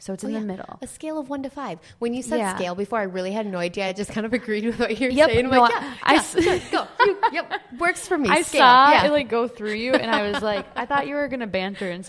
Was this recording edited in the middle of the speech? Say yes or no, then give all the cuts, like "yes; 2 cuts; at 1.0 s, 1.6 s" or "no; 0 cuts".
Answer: no; 0 cuts